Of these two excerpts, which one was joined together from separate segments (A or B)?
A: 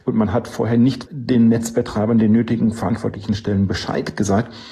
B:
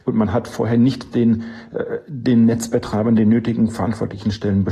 A